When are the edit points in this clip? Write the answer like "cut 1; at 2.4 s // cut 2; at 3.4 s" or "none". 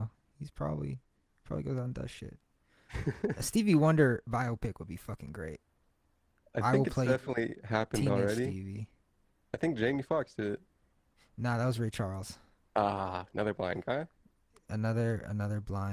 none